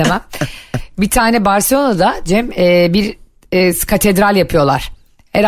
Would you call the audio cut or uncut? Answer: uncut